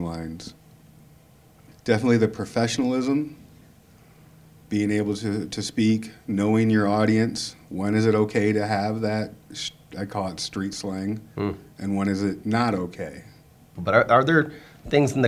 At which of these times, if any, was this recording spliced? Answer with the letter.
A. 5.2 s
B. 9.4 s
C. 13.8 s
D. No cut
C